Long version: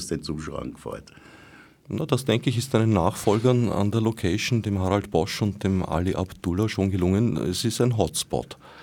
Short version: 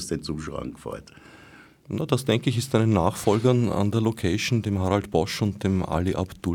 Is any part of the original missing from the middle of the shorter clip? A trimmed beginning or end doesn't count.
no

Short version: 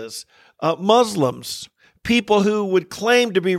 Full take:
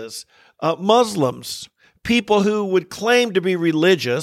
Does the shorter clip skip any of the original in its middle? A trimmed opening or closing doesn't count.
no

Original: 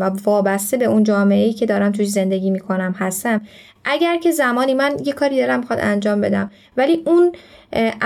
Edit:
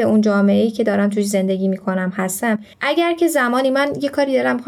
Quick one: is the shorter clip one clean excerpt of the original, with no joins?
no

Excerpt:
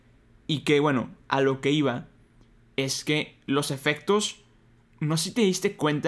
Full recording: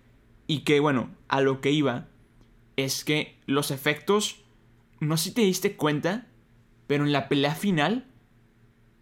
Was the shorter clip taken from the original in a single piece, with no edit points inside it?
yes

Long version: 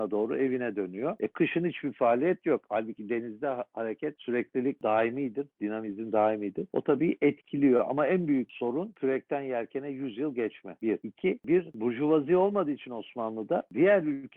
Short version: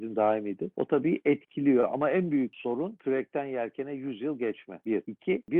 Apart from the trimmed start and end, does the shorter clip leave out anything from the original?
no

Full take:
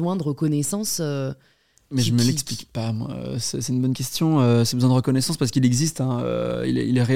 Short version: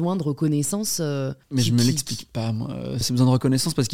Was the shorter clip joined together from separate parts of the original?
yes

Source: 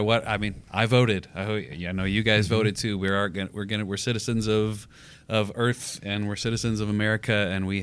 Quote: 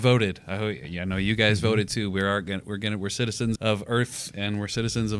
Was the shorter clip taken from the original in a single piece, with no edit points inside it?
no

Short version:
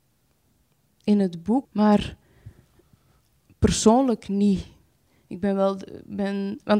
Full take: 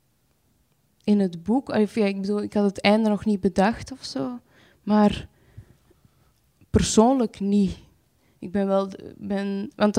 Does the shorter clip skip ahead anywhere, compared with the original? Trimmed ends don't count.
yes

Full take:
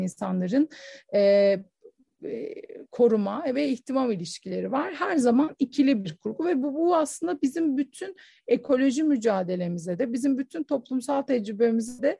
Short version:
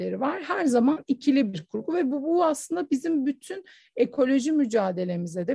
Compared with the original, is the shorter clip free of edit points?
yes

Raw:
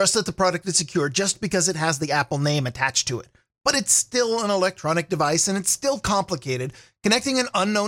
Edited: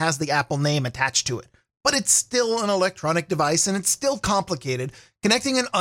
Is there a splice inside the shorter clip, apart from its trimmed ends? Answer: no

